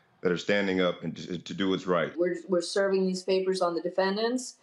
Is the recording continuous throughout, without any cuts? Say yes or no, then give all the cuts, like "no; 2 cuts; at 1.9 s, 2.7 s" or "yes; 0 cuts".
no; 1 cut; at 2.1 s